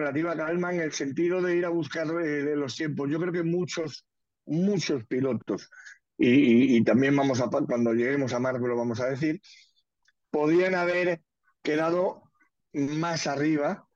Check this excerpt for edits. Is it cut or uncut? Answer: uncut